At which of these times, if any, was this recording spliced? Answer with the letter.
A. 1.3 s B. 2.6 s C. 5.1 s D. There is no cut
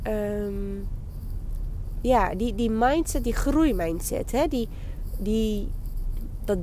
D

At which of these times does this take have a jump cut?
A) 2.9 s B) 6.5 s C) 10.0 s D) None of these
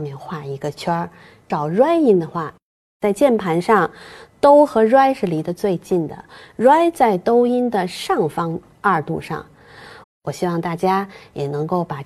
C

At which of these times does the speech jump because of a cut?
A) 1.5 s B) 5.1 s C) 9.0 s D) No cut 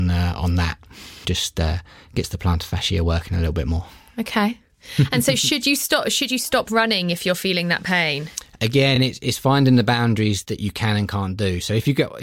D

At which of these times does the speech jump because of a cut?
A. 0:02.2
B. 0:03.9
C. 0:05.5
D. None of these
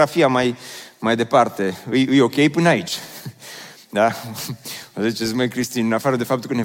D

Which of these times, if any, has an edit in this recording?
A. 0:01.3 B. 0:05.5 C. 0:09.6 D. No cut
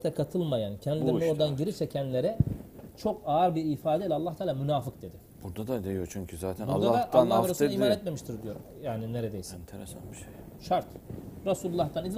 D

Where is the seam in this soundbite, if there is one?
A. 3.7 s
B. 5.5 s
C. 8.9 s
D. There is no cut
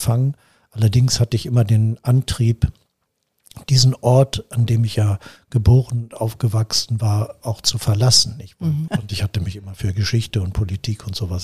C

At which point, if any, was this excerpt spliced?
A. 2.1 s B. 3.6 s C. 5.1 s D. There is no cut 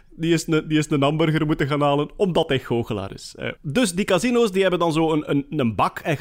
B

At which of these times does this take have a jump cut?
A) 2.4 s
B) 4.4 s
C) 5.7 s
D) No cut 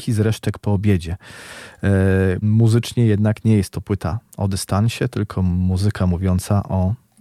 A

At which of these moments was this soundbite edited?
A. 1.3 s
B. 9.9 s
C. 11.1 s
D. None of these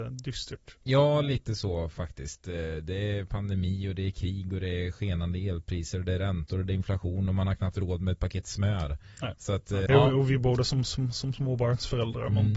B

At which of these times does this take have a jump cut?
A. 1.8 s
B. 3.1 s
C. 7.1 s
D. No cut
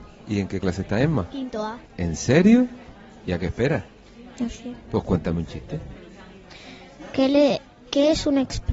A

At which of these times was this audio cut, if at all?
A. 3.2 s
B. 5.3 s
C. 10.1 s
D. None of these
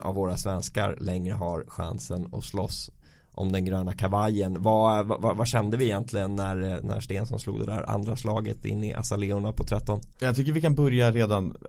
D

